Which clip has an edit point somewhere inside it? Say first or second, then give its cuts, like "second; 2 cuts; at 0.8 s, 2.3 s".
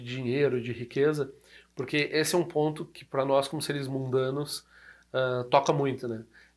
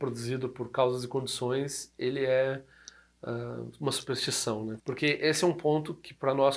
second; 1 cut; at 4.8 s